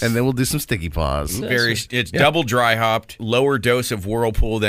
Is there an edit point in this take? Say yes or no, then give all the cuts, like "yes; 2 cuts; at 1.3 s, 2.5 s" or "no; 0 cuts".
yes; 1 cut; at 1.4 s